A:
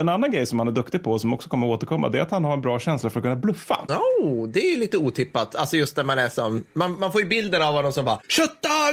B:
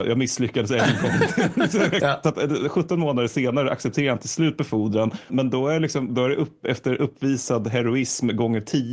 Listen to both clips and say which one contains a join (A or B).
B